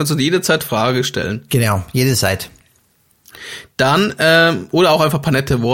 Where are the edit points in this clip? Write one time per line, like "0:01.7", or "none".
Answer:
0:01.5